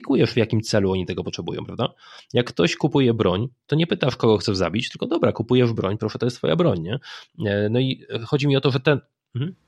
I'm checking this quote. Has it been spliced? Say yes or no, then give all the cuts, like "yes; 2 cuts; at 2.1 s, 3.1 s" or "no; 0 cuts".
no; 0 cuts